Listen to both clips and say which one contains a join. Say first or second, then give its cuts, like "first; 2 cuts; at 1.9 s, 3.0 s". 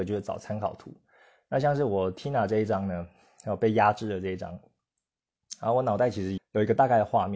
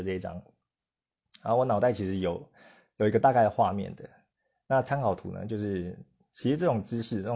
first; 1 cut; at 6.4 s